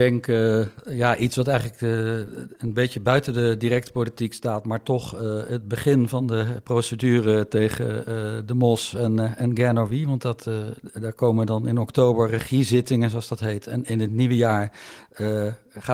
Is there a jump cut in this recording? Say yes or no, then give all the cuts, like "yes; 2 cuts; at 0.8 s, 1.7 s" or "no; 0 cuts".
no; 0 cuts